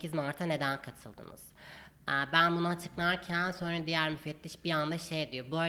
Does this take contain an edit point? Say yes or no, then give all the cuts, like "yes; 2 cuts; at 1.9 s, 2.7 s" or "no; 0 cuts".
no; 0 cuts